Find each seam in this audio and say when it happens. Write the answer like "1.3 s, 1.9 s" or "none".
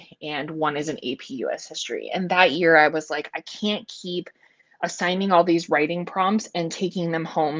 none